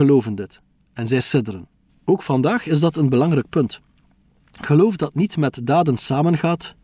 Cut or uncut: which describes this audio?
cut